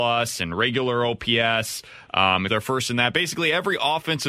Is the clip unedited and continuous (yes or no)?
no